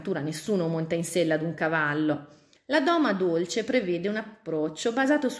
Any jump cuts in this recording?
yes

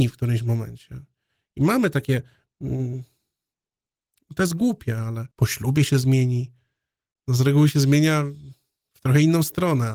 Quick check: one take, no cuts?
no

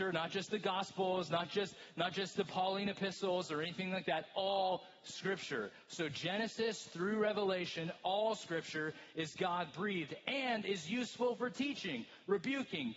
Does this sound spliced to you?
no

